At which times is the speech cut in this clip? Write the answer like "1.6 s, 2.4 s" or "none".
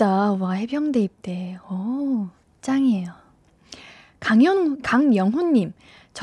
4.8 s

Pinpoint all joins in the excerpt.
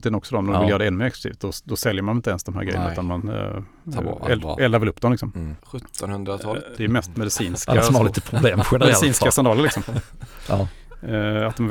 5.6 s, 6.8 s

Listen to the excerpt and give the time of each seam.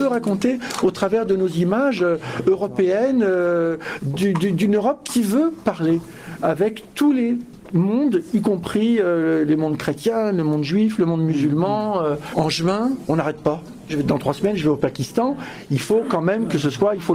12.3 s, 13.9 s

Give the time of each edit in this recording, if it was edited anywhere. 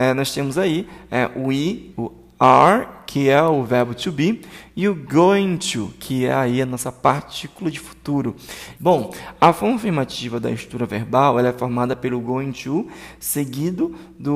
1.9 s, 8.8 s

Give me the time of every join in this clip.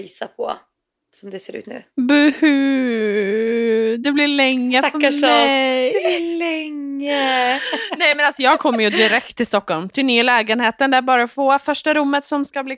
1.6 s

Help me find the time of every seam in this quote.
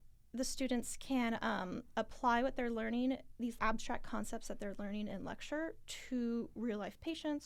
3.6 s

